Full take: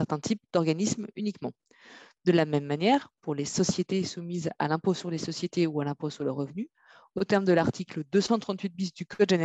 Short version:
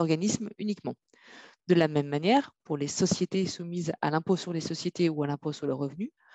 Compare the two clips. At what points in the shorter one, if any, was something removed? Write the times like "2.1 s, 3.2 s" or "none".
none